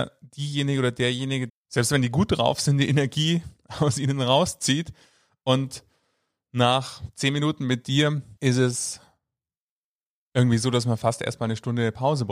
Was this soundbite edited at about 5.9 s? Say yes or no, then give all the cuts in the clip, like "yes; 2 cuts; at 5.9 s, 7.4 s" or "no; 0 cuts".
no; 2 cuts; at 1.5 s, 8.4 s